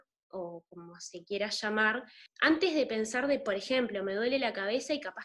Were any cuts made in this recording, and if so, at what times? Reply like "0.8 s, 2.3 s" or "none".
none